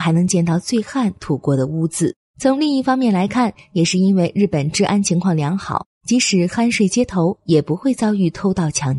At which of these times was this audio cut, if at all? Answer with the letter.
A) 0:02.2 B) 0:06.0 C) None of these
A